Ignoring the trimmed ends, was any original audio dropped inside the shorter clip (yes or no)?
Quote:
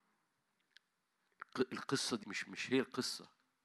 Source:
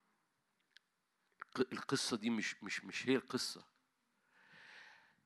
yes